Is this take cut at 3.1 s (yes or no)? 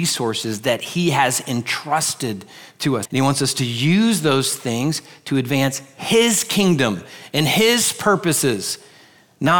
yes